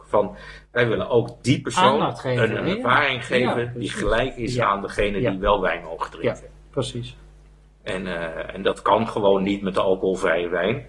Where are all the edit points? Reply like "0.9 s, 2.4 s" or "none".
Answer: none